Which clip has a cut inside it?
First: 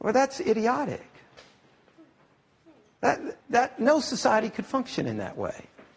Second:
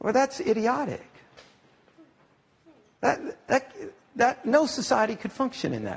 first; 1 cut; at 3.4 s

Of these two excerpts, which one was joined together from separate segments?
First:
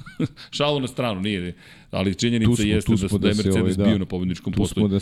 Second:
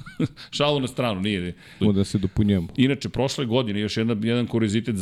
second; 1 cut; at 1.8 s

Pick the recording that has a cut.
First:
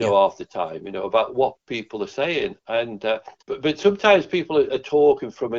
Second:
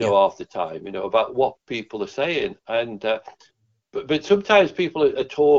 first; 1 cut; at 3.4 s

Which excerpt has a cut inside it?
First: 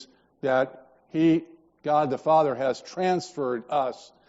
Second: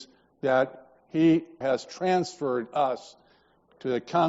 second; 1 cut; at 1.6 s

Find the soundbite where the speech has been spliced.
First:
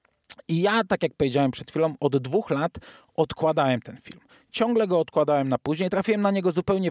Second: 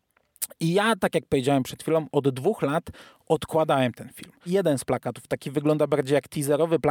second; 1 cut; at 4.5 s

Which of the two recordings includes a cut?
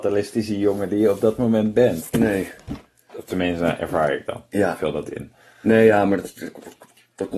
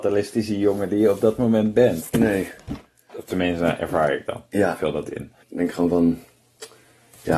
second; 1 cut; at 5.4 s

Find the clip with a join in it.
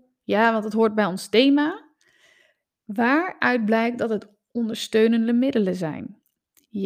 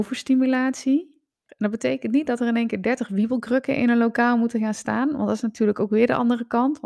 second; 1 cut; at 1.5 s

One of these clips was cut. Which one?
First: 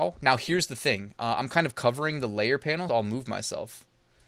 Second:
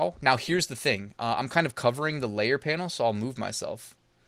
first; 1 cut; at 2.9 s

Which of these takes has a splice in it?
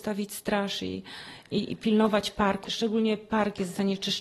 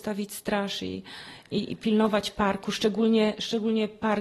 first; 1 cut; at 2.6 s

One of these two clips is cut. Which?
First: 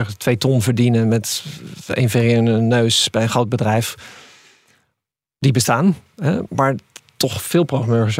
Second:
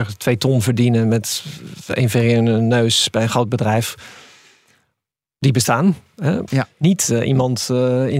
second; 1 cut; at 6.5 s

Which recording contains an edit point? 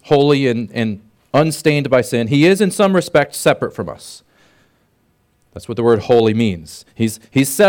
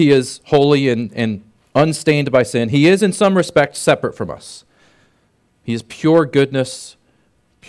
second; 1 cut; at 5.5 s

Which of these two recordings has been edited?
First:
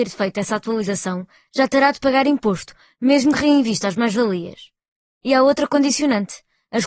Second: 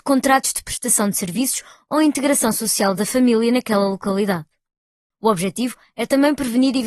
second; 1 cut; at 5.1 s

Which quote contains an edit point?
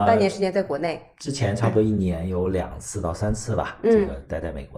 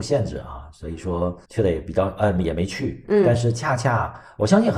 second; 1 cut; at 1.4 s

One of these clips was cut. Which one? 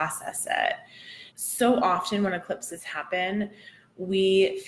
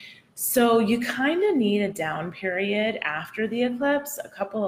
first; 1 cut; at 1.3 s

